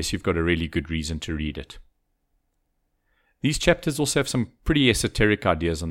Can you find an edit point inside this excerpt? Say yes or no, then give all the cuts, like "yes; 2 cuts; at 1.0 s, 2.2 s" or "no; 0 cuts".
no; 0 cuts